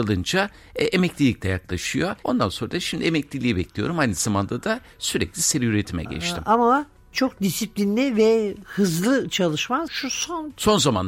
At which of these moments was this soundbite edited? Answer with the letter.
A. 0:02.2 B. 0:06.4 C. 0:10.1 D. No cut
A